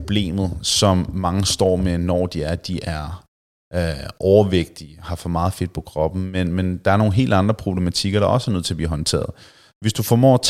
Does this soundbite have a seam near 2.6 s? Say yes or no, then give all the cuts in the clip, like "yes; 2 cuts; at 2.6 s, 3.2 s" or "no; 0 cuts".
no; 0 cuts